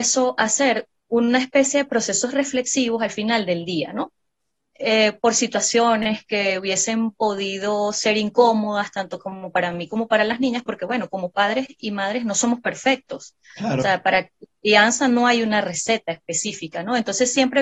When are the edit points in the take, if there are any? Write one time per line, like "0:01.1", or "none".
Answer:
none